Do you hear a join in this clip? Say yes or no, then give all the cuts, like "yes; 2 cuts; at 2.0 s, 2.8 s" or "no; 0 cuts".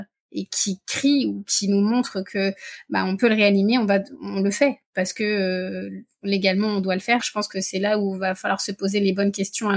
yes; 1 cut; at 7.2 s